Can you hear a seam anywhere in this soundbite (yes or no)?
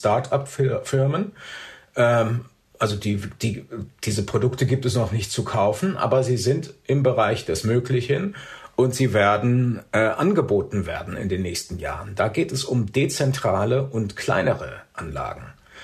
no